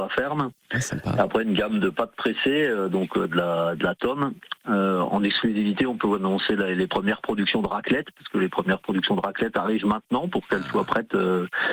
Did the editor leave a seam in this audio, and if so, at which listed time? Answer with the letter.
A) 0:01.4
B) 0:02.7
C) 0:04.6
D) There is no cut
D